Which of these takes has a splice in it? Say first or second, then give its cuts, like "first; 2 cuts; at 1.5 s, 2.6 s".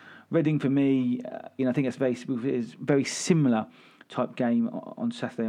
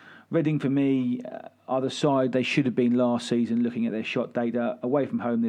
first; 1 cut; at 1.6 s